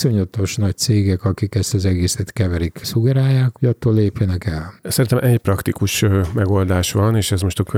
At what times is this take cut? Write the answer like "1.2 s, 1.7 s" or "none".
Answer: 3.5 s